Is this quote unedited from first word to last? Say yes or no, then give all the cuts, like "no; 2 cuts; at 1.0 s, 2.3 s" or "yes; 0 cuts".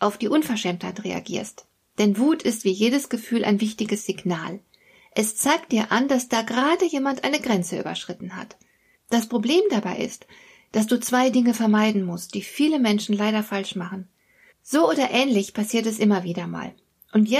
no; 2 cuts; at 9.0 s, 14.5 s